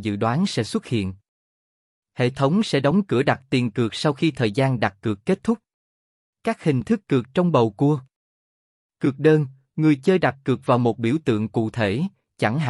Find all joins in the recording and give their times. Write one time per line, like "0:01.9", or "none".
0:06.3